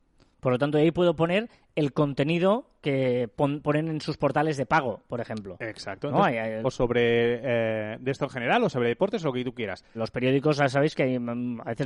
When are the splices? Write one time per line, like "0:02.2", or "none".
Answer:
0:06.6
0:09.9

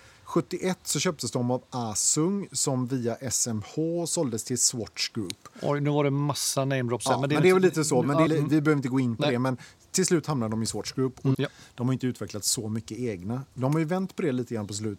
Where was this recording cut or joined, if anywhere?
0:08.3
0:11.3

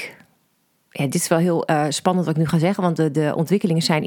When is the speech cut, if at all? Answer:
none

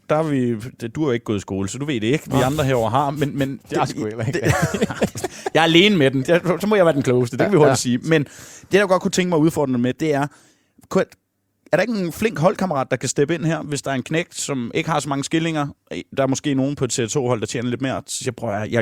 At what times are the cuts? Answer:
0:03.6

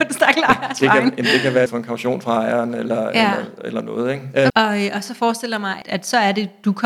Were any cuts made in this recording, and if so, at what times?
0:01.7
0:04.5
0:05.8

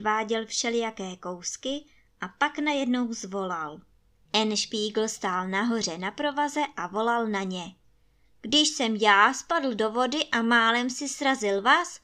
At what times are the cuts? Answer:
0:04.3

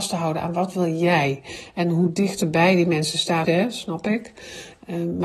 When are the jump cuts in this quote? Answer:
0:03.4

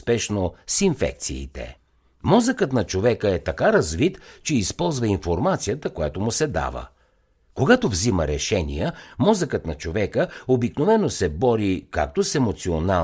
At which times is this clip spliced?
none

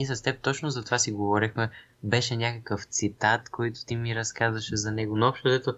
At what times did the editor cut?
none

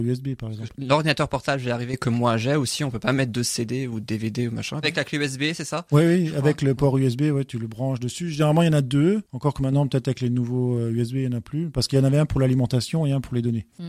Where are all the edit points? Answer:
0:04.8

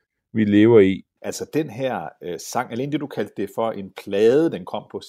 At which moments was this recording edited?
0:01.2

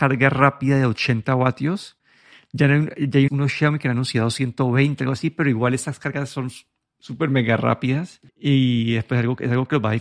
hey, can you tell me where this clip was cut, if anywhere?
0:03.3
0:08.3

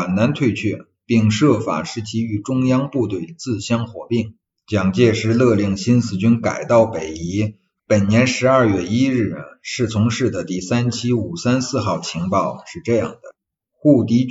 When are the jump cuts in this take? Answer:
0:04.6
0:07.8

